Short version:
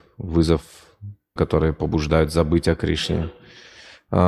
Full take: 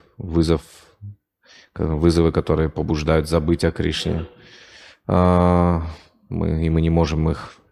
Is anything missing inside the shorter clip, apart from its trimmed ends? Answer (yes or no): yes